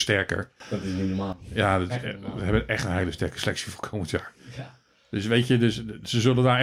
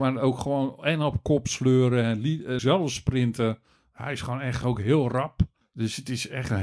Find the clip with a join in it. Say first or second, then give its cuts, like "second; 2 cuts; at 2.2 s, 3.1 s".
second; 1 cut; at 2.6 s